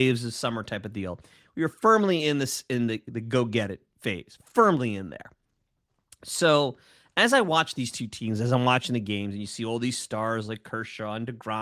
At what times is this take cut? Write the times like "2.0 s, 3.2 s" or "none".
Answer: none